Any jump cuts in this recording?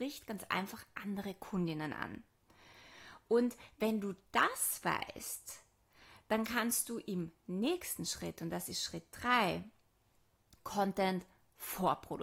no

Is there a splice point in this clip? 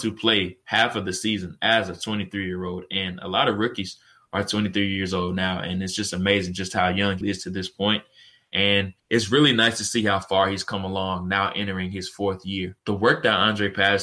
yes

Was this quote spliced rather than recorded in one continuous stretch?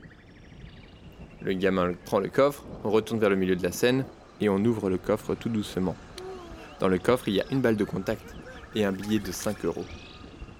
no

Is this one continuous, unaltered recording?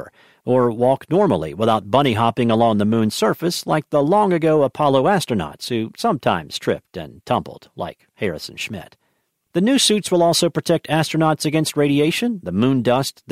yes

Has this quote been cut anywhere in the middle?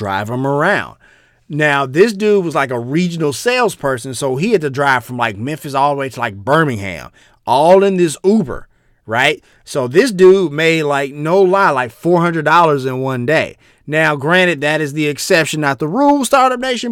no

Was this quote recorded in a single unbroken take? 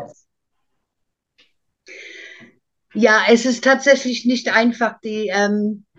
yes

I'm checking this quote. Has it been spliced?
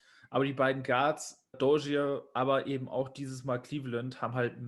yes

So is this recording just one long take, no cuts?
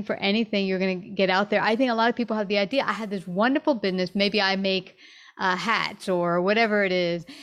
yes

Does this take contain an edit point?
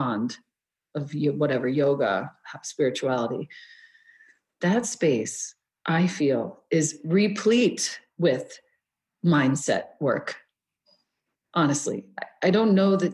no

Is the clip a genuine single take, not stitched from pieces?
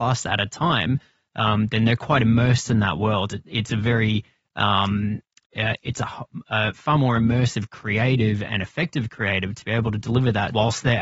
yes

